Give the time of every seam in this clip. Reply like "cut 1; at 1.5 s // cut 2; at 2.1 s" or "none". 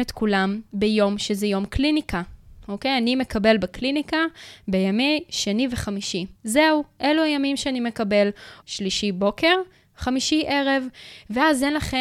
cut 1; at 6.4 s // cut 2; at 8.6 s